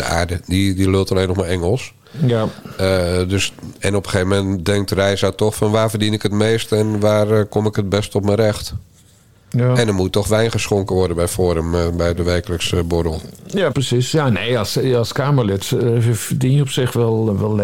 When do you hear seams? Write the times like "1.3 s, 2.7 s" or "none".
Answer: 13.7 s